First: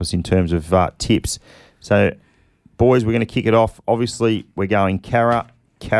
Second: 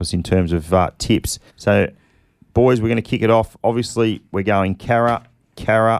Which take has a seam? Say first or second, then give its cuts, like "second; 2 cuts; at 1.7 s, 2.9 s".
second; 1 cut; at 1.5 s